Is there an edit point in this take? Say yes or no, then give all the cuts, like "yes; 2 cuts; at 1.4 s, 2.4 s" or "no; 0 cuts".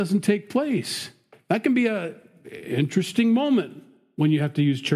no; 0 cuts